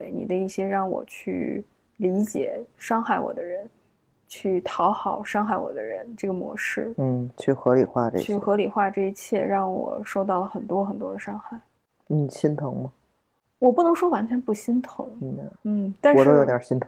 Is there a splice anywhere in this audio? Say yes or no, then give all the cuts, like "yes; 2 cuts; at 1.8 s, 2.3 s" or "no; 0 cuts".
no; 0 cuts